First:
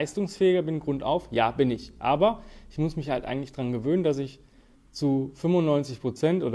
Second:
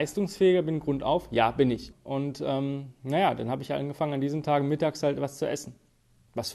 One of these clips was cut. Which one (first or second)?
second